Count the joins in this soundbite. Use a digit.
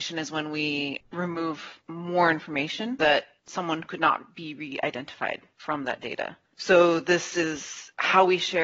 2